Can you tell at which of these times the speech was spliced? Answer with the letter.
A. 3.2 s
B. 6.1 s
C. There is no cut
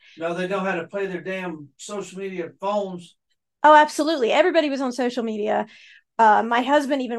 C